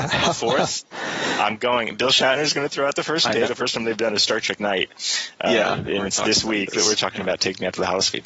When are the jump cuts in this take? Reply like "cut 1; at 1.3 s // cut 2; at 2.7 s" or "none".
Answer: cut 1; at 3.4 s